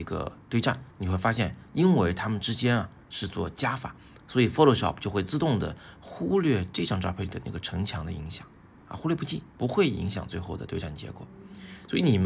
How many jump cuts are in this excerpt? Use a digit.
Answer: 2